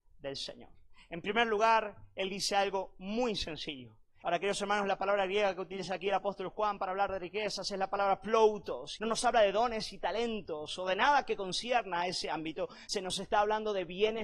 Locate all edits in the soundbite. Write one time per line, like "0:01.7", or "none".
0:04.2
0:09.0
0:12.9